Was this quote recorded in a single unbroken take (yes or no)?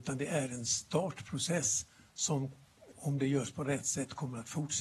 no